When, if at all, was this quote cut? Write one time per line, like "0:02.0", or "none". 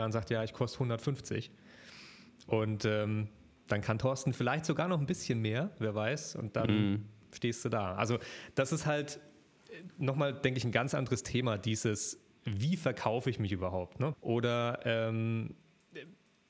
0:14.1